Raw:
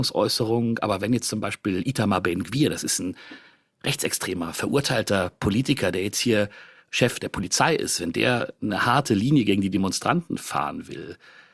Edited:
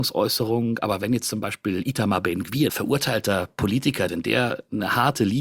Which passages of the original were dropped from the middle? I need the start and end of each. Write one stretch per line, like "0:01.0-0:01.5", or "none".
0:02.7-0:04.5
0:05.9-0:08.0